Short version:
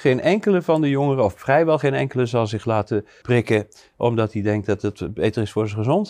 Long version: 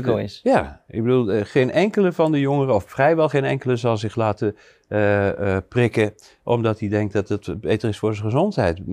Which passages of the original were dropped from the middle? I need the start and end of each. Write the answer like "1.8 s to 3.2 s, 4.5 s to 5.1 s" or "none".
4.7 s to 5.7 s